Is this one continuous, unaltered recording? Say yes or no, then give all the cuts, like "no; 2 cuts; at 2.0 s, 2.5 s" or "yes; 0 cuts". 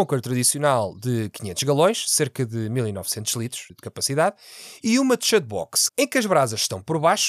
no; 2 cuts; at 3.7 s, 5.9 s